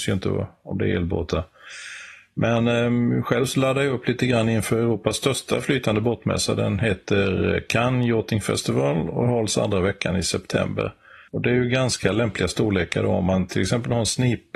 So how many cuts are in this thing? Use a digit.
1